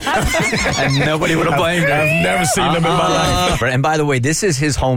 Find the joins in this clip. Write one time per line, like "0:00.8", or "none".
0:03.6

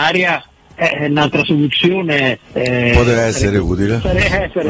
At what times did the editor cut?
0:02.4

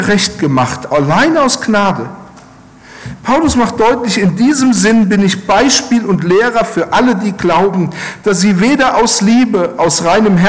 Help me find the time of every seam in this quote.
none

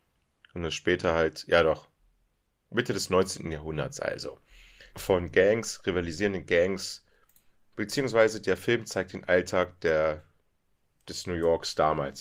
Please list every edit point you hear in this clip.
0:04.9

